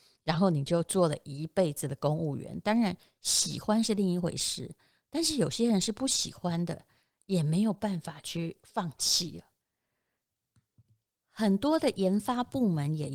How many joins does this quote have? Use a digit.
0